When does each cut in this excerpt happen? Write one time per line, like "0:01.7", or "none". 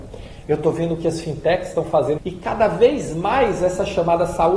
0:02.2